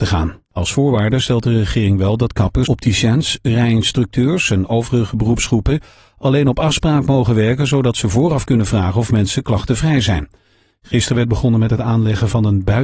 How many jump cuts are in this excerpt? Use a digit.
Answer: 2